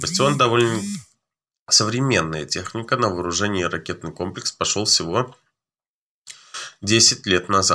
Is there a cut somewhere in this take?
no; 0 cuts

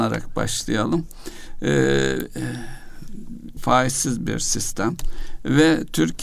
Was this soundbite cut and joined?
yes; 1 cut; at 3.6 s

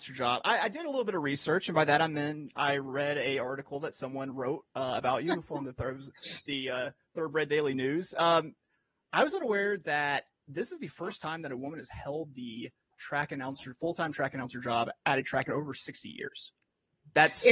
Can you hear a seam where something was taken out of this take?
no; 0 cuts

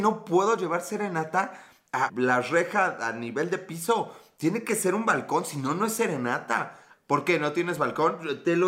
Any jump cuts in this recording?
yes; 2 cuts; at 2.1 s, 6.9 s

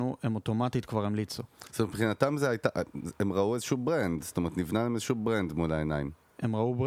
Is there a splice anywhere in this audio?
no; 0 cuts

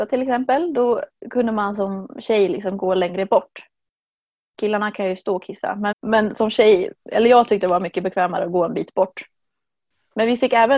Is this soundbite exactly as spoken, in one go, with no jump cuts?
no; 1 cut; at 5.9 s

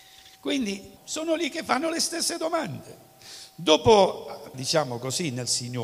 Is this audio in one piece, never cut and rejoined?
no; 2 cuts; at 1.0 s, 4.5 s

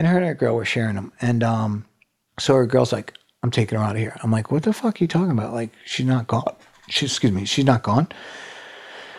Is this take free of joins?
yes; 0 cuts

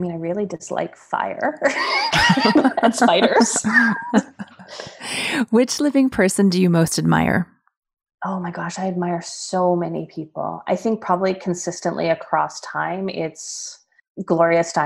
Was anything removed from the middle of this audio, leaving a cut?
no; 0 cuts

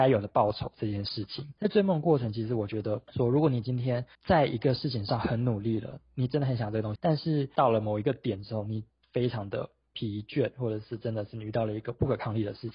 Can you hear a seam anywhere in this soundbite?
yes; 2 cuts; at 4.1 s, 7.0 s

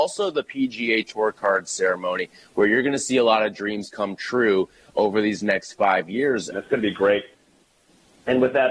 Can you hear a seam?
yes; 1 cut; at 6.5 s

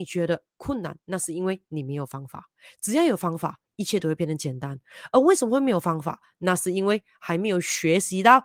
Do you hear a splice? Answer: no; 0 cuts

